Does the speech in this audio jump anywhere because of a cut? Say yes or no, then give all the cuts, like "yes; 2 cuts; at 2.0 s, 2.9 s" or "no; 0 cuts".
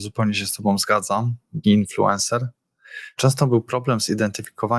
yes; 2 cuts; at 1.6 s, 3.1 s